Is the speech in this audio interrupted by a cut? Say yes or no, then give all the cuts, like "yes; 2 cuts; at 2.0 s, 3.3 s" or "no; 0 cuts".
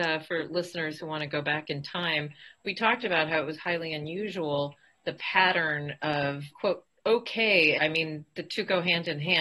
yes; 2 cuts; at 6.5 s, 7.8 s